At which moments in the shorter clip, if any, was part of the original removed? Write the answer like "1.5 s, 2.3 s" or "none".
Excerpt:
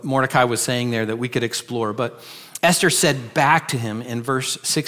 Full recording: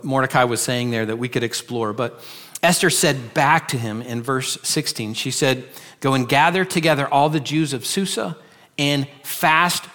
none